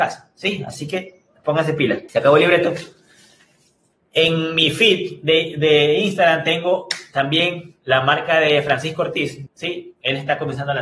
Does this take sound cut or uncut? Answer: cut